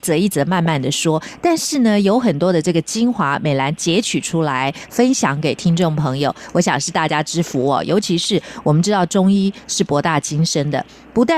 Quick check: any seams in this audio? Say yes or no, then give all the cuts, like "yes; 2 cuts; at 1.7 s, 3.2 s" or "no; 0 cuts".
no; 0 cuts